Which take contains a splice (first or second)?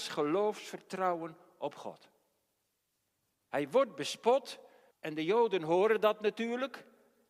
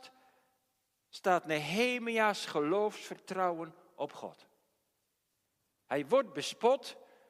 first